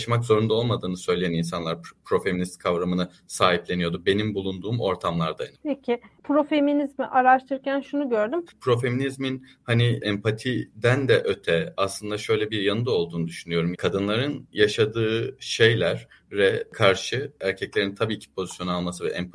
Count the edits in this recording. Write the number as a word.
two